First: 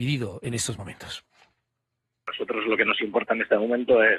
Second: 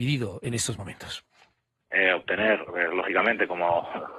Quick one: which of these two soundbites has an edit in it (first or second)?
second